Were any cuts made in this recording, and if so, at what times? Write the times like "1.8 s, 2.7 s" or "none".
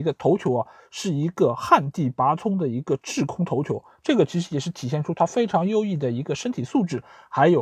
none